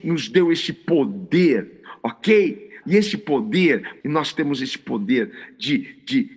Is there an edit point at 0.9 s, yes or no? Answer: no